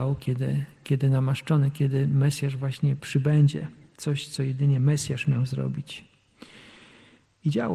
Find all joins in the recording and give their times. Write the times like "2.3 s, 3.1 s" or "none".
none